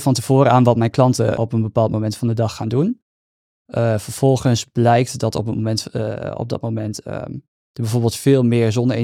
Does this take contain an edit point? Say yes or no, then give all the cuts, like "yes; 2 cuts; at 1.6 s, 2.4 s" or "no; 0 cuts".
yes; 1 cut; at 1.4 s